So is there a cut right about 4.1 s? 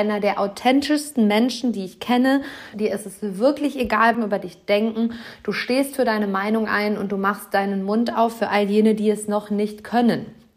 yes; 2 cuts; at 2.7 s, 4.1 s

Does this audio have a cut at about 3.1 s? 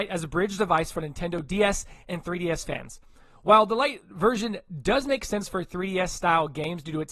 no; 0 cuts

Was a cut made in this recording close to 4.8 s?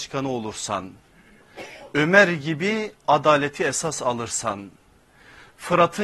no; 0 cuts

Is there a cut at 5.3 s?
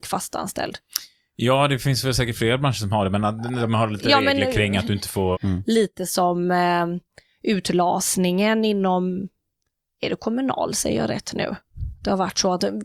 yes; 1 cut; at 5.3 s

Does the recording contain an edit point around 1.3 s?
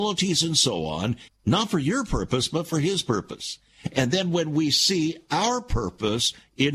yes; 1 cut; at 1.3 s

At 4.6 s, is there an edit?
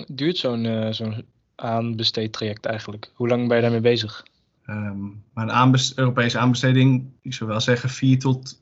yes; 2 cuts; at 4.6 s, 7.2 s

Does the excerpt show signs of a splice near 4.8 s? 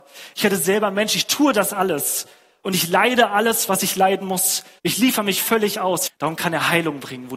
yes; 2 cuts; at 4.8 s, 6.1 s

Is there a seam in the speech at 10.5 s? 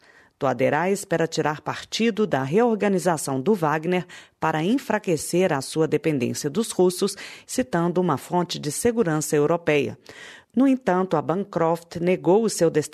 no; 1 cut; at 7.4 s

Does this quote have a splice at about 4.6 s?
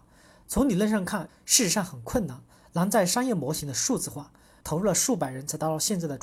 yes; 2 cuts; at 1.3 s, 4.6 s

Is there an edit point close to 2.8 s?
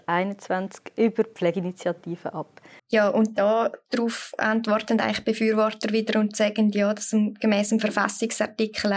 yes; 1 cut; at 2.8 s

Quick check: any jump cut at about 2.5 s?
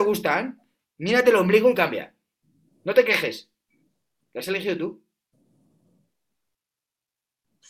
no; 0 cuts

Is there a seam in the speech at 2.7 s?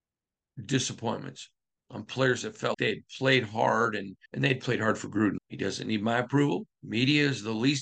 yes; 3 cuts; at 2.7 s, 4.3 s, 5.4 s

